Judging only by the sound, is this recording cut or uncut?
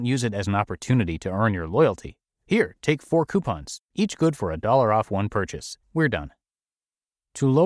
cut